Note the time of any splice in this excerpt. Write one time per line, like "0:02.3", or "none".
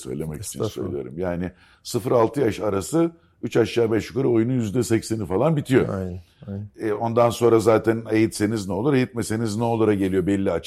none